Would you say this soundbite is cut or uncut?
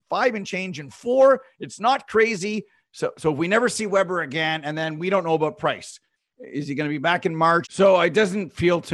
cut